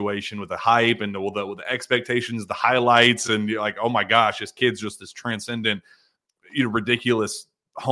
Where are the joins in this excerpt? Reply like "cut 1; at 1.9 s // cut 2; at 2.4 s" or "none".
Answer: none